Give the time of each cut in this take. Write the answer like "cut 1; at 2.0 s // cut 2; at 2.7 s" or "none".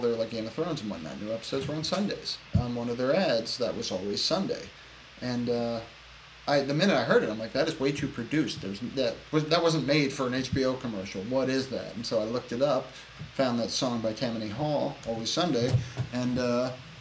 cut 1; at 2.5 s